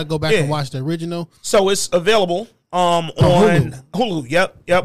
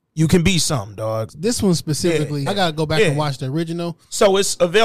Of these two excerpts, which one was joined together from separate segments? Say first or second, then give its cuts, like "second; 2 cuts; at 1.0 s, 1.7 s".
second; 2 cuts; at 1.3 s, 2.5 s